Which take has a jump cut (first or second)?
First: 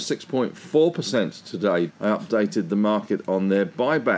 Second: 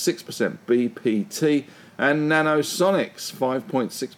first